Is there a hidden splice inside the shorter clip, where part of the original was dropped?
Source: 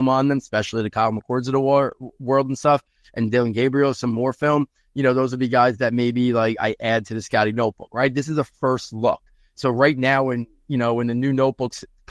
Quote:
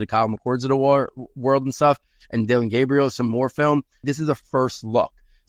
yes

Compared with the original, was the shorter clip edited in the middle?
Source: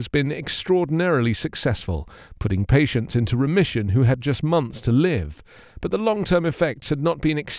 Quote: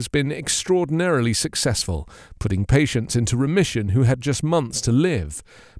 no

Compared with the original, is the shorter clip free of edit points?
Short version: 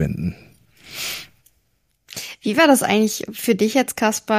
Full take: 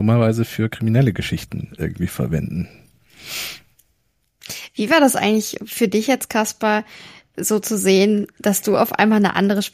yes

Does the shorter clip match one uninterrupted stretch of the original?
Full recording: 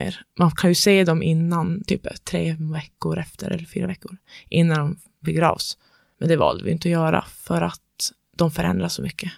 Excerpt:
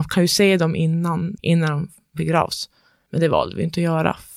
no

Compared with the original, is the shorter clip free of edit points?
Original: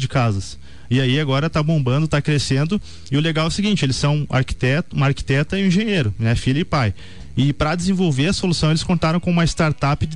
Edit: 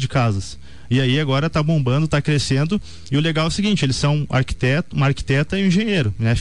yes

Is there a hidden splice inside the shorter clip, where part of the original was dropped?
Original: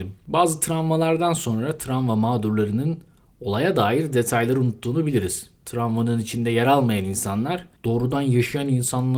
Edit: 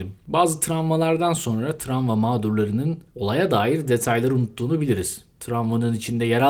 yes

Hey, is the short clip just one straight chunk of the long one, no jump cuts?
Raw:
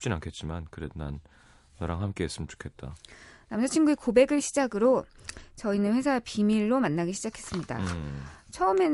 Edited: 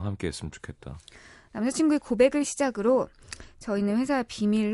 yes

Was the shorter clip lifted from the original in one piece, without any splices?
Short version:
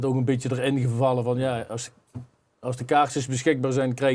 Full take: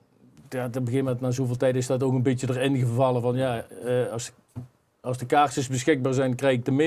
no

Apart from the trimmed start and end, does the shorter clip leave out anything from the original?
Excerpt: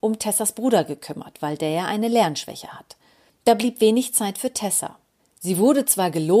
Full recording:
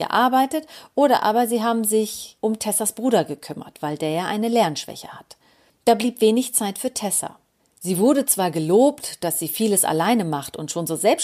no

